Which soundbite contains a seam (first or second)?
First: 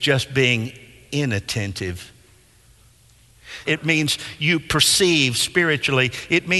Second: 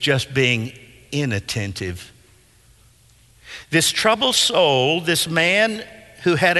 first